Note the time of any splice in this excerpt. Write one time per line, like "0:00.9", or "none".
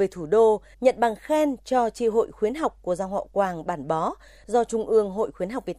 none